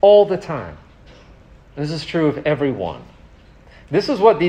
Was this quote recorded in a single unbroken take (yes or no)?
yes